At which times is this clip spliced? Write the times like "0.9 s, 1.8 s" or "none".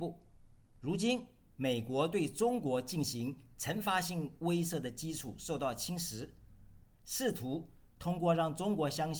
1.5 s, 6.8 s